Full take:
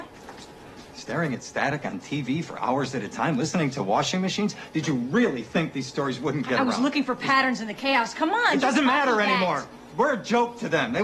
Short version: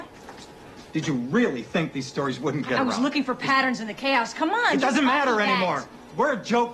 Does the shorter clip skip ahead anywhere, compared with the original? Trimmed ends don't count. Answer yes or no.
yes